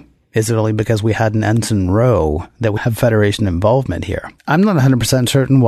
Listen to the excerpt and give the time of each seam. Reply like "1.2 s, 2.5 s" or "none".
2.8 s, 4.4 s